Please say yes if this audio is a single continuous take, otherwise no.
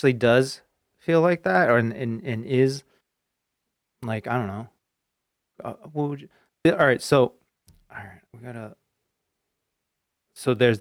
no